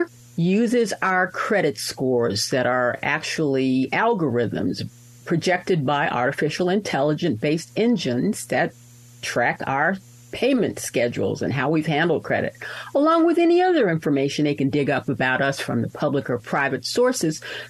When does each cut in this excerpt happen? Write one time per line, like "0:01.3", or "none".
none

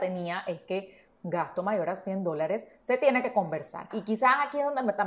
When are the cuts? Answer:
0:03.9

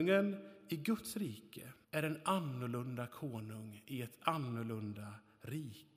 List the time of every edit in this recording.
0:01.8

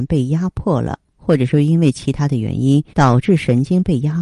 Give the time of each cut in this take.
0:02.9

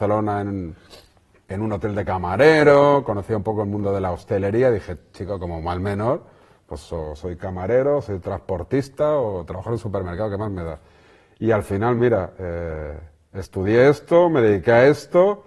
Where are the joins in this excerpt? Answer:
none

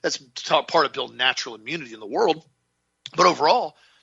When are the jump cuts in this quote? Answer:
none

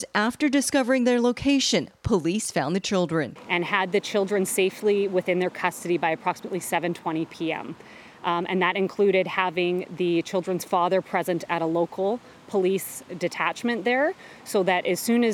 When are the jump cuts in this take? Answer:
none

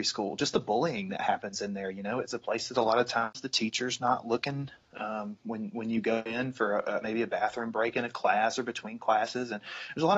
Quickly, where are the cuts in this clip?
none

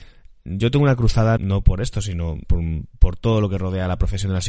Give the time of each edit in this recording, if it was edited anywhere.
0:01.4
0:02.4

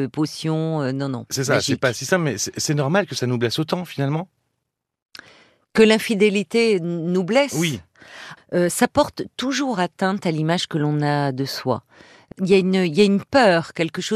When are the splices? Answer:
0:08.4
0:12.3

